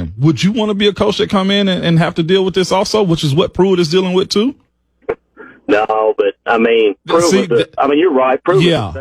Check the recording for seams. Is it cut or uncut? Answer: uncut